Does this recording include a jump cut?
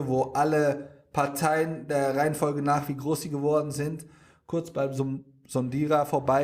no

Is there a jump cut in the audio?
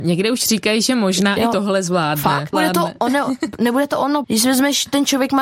yes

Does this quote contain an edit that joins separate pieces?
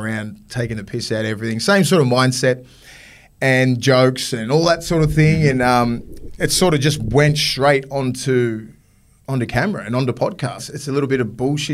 yes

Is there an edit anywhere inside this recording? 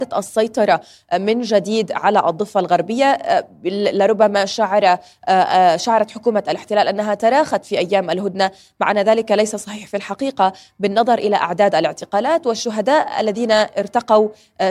no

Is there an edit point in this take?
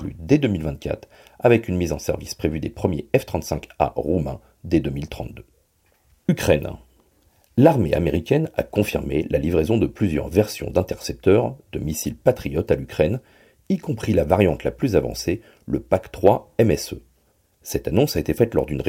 no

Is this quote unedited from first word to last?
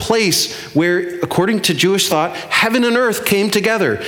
yes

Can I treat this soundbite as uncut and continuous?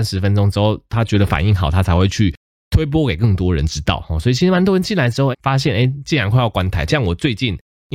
no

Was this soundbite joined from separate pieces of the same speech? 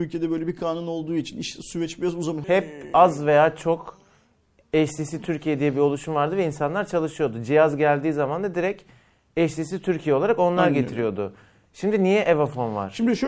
yes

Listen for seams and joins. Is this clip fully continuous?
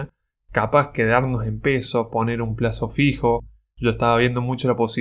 yes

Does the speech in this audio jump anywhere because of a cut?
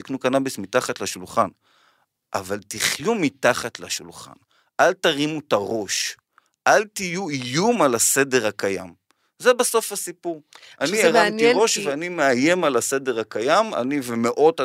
no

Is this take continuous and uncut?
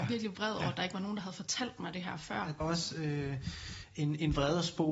no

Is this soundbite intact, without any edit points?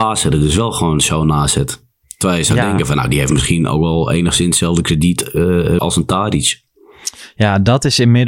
no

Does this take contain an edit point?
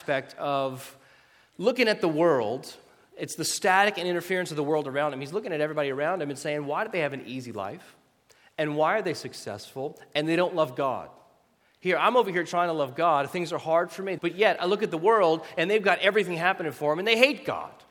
yes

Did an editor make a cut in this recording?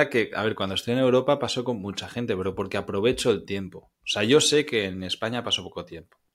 no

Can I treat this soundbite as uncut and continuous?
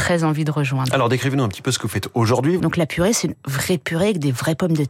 no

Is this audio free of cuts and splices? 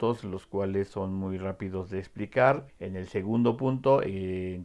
no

